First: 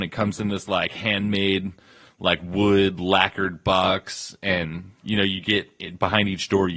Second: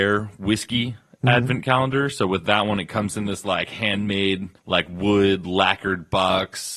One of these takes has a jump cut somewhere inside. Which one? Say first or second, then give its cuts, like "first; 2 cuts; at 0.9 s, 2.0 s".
second; 1 cut; at 4.6 s